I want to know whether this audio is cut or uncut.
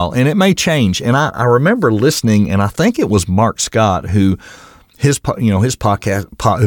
uncut